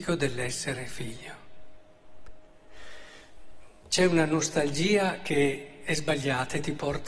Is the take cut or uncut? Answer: uncut